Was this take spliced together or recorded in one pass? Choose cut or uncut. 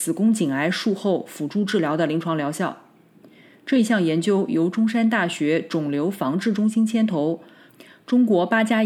uncut